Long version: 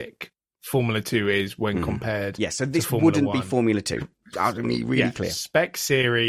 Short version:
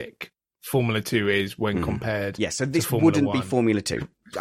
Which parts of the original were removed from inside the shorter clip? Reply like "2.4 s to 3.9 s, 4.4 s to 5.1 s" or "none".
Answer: none